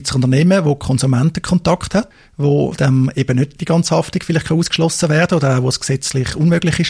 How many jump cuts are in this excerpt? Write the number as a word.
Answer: zero